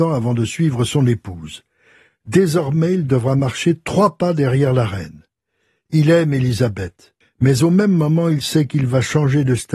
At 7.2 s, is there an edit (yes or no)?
yes